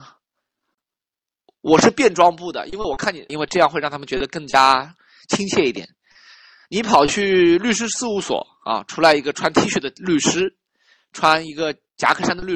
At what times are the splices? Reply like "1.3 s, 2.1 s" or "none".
3.3 s